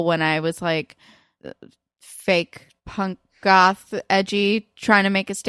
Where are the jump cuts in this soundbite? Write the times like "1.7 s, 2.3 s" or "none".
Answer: 1.4 s, 2.8 s